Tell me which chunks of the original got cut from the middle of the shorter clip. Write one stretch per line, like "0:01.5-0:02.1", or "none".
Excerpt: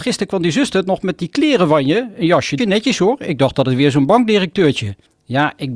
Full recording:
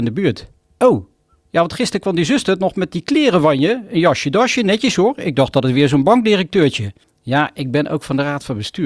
0:04.3-0:04.5